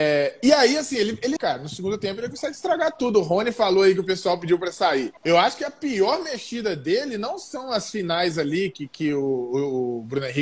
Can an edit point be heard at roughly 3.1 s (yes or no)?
no